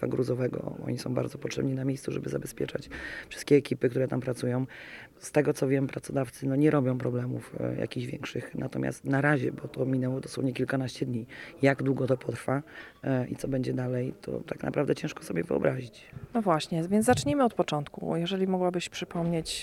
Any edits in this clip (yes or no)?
no